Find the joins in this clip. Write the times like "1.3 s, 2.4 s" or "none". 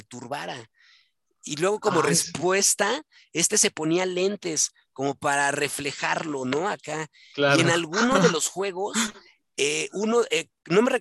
none